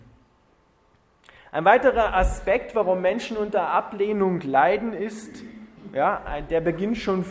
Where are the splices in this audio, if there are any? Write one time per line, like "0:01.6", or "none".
none